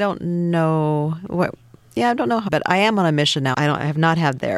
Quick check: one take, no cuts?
no; 2 cuts; at 2.5 s, 3.5 s

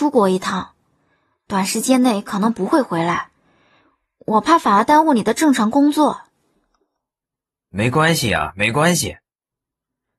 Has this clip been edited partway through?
no; 0 cuts

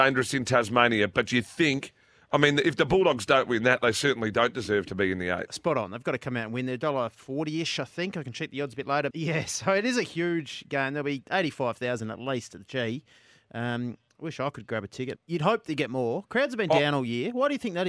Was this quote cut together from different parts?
yes; 2 cuts; at 9.1 s, 15.2 s

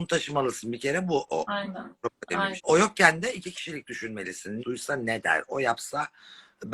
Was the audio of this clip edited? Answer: yes; 2 cuts; at 2.6 s, 4.6 s

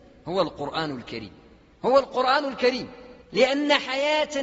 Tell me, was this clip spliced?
yes; 1 cut; at 3.2 s

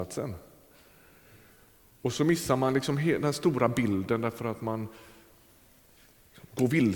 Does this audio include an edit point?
no; 0 cuts

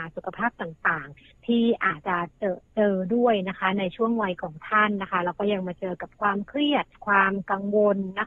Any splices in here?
yes; 2 cuts; at 2.0 s, 6.9 s

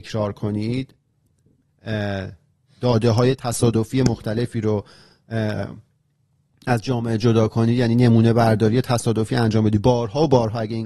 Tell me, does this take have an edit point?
no; 0 cuts

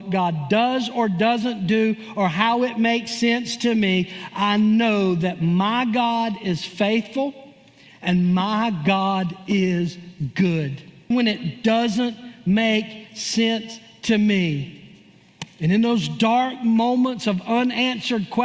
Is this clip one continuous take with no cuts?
no; 1 cut; at 11.1 s

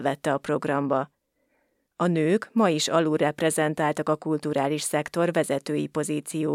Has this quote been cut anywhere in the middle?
no; 0 cuts

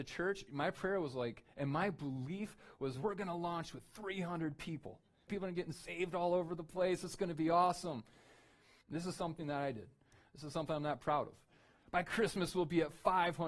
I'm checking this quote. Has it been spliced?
yes; 3 cuts; at 5.3 s, 8.8 s, 11.8 s

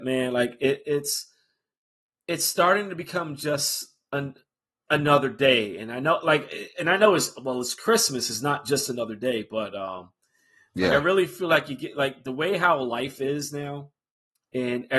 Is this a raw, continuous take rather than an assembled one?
yes; 0 cuts

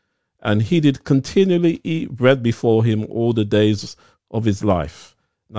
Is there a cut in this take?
no; 0 cuts

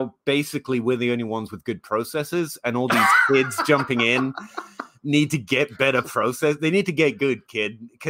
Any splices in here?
no; 0 cuts

